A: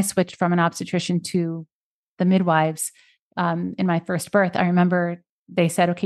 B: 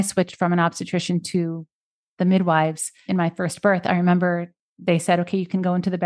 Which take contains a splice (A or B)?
B